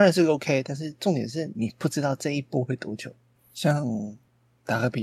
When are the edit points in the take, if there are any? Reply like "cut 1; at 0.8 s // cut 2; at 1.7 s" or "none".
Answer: cut 1; at 1.5 s // cut 2; at 3.3 s

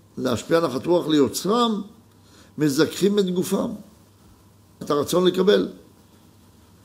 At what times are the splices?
cut 1; at 4.8 s

